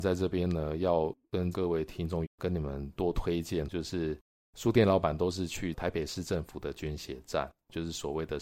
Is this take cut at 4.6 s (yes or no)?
no